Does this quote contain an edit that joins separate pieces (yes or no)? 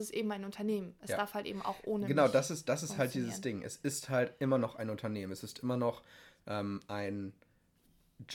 no